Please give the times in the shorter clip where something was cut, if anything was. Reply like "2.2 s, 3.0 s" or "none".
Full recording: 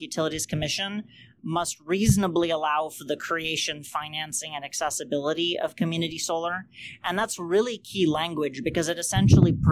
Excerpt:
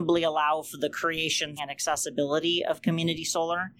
1.6 s